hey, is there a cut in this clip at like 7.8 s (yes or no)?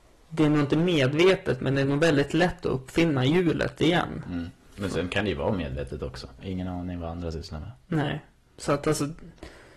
no